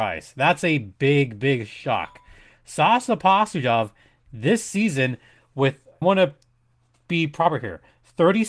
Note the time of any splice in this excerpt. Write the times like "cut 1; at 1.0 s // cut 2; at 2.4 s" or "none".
cut 1; at 6.0 s